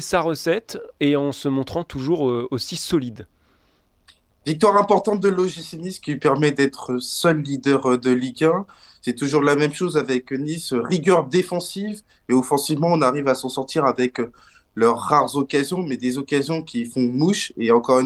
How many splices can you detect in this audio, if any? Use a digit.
0